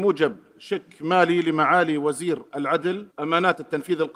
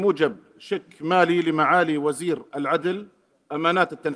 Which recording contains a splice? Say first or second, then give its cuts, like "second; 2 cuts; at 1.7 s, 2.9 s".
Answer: first; 1 cut; at 3.1 s